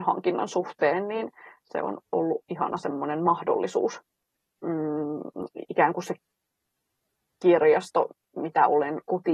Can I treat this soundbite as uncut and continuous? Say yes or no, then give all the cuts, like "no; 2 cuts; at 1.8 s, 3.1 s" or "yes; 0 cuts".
no; 1 cut; at 4.6 s